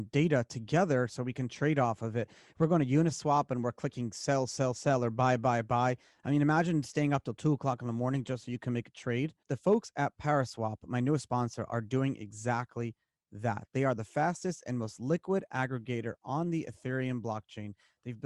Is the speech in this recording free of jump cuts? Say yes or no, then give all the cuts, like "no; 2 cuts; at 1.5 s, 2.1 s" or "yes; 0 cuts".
yes; 0 cuts